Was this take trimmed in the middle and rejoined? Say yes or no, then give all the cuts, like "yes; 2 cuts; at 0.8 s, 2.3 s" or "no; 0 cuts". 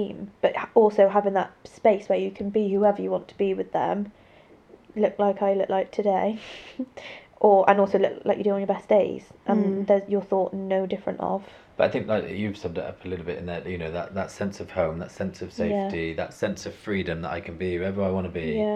no; 0 cuts